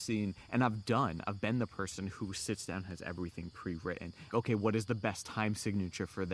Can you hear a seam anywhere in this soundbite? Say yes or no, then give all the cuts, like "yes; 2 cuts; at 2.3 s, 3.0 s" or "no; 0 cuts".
yes; 1 cut; at 4.3 s